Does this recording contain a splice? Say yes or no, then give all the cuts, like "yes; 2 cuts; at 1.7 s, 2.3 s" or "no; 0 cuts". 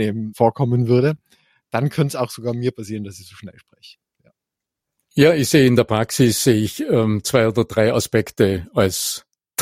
no; 0 cuts